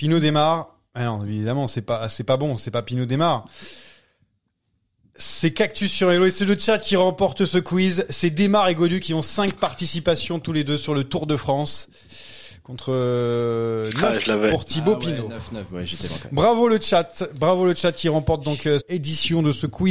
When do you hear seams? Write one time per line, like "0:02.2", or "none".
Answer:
0:18.8